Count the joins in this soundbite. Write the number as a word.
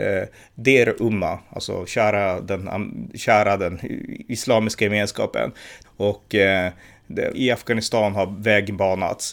two